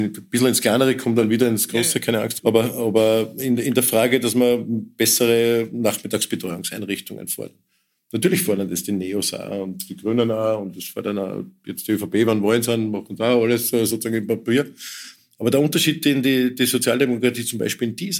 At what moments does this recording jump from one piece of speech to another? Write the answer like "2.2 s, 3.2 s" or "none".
2.4 s